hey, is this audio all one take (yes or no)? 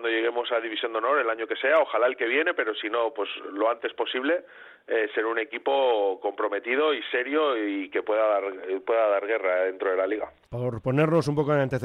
yes